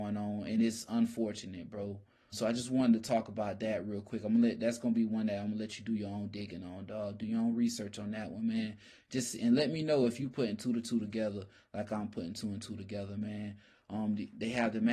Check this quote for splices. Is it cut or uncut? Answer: cut